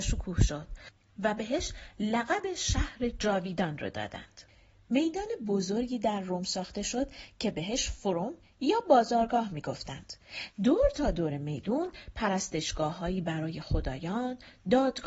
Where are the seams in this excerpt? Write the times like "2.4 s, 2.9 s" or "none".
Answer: 10.5 s